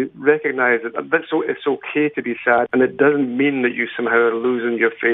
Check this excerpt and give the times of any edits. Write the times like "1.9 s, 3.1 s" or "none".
2.7 s